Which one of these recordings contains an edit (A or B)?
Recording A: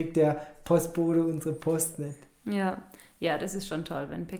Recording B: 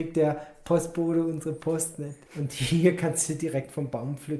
B